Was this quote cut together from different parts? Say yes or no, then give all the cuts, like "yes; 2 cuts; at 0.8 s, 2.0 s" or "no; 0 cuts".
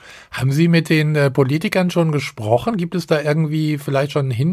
no; 0 cuts